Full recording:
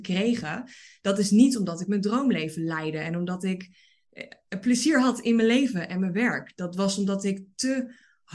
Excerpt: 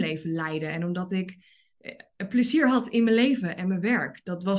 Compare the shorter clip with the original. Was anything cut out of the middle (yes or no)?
no